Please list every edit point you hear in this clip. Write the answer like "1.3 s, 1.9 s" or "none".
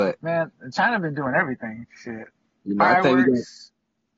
none